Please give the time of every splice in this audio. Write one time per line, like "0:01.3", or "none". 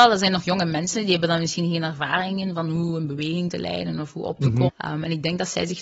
0:04.7